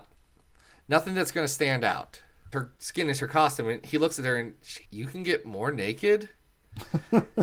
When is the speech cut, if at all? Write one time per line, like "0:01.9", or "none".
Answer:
0:02.5
0:04.8